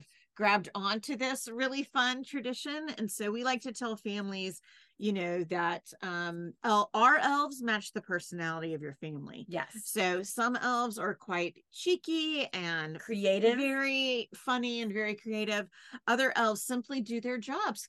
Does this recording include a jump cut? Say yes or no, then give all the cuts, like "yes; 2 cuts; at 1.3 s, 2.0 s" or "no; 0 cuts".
no; 0 cuts